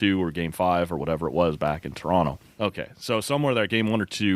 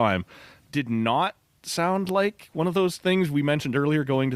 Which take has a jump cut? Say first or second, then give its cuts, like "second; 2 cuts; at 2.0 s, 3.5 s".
first; 1 cut; at 2.4 s